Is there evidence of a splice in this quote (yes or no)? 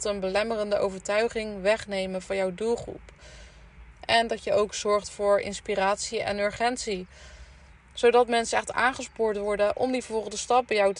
yes